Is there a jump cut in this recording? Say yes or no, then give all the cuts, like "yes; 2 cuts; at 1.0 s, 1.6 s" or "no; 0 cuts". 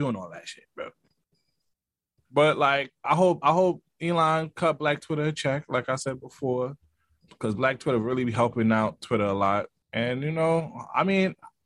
no; 0 cuts